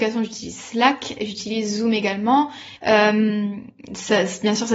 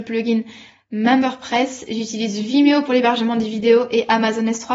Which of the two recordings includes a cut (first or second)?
first